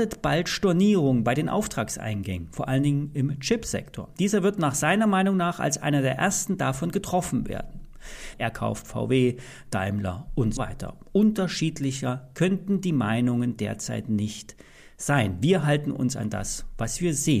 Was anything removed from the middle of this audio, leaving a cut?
yes; 2 cuts; at 8.3 s, 10.6 s

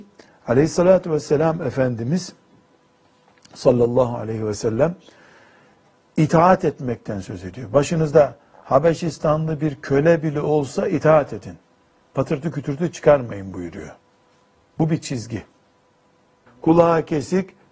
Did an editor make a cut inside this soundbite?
yes; 1 cut; at 16.5 s

